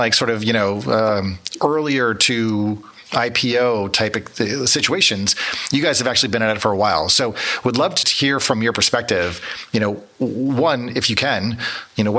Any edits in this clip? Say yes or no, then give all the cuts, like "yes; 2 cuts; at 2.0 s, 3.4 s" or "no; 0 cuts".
yes; 1 cut; at 8.0 s